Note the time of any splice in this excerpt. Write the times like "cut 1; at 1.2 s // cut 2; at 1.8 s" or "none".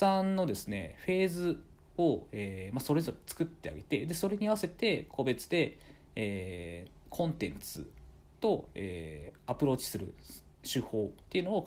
none